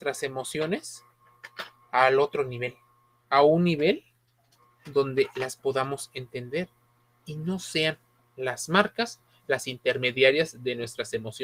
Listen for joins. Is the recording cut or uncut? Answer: uncut